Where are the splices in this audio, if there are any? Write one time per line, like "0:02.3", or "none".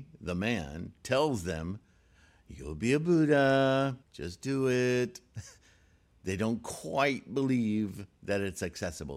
0:04.0